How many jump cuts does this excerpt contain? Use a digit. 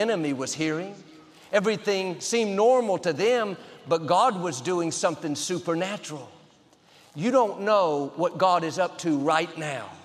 0